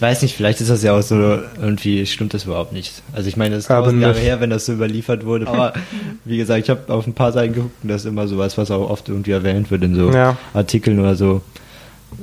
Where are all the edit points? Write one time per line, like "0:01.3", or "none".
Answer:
0:05.5